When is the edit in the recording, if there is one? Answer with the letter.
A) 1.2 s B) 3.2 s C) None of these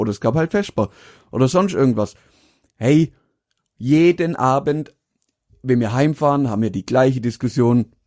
C